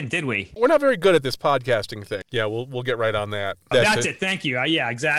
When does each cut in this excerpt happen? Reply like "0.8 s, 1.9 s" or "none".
2.2 s, 3.7 s

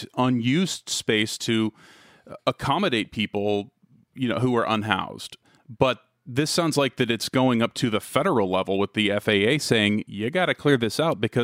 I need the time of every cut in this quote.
none

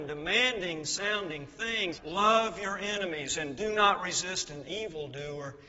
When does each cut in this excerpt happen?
2.0 s

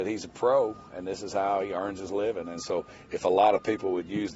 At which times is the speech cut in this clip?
none

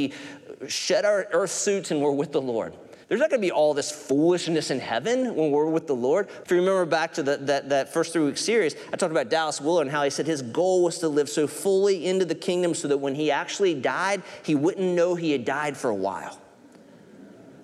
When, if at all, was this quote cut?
3.0 s, 6.4 s

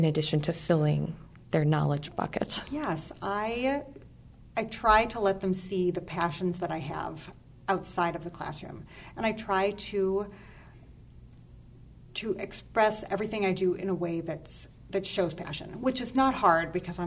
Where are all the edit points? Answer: none

